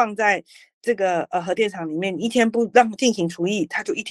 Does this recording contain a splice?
no; 0 cuts

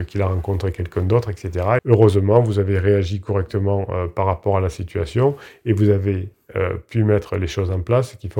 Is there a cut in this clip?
yes; 1 cut; at 1.8 s

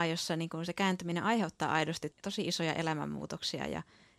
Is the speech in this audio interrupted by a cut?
yes; 1 cut; at 2.1 s

